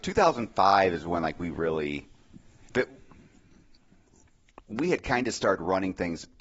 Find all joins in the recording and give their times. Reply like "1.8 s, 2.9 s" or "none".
none